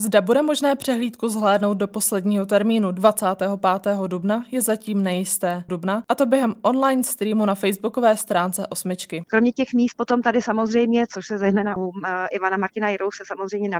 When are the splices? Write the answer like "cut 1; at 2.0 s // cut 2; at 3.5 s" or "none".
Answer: cut 1; at 5.7 s // cut 2; at 9.2 s // cut 3; at 11.8 s